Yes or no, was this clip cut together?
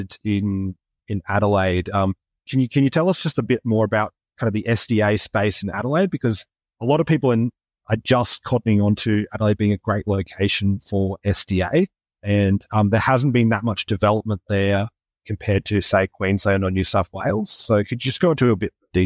no